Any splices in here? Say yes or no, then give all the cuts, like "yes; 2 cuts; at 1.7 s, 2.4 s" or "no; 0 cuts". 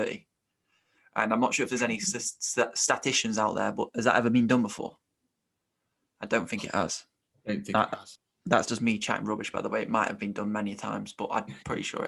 no; 0 cuts